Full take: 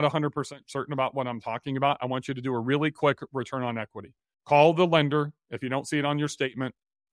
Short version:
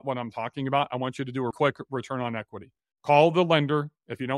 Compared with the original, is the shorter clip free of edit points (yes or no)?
no